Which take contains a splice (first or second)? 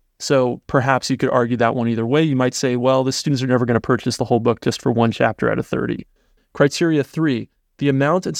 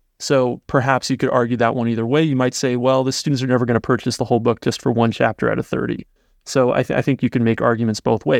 first